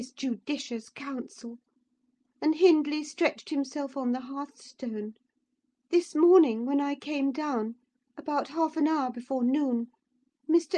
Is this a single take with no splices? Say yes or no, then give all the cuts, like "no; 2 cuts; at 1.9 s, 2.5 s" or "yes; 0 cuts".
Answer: no; 1 cut; at 5.8 s